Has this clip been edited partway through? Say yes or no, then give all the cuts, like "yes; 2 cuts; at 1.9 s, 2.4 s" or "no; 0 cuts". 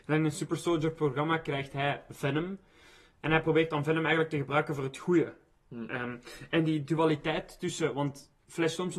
no; 0 cuts